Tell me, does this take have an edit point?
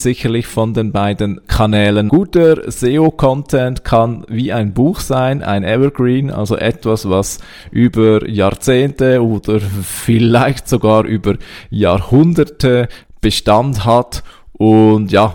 yes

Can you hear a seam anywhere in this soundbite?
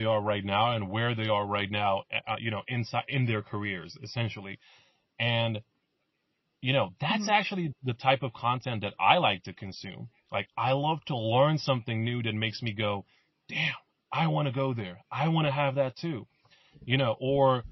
no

